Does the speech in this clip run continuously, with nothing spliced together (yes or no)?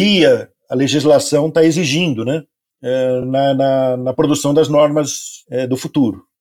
yes